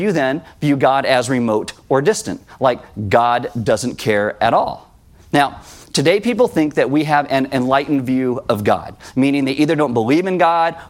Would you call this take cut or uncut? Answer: uncut